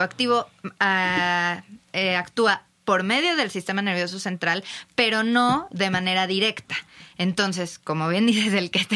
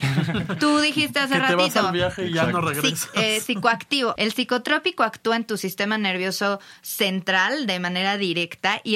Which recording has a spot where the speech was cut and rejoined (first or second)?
second